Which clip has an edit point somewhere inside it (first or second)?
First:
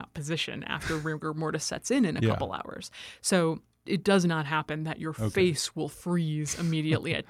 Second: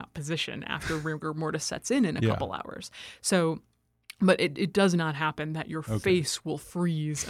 first